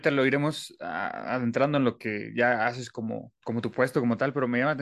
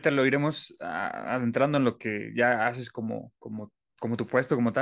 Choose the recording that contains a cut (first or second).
first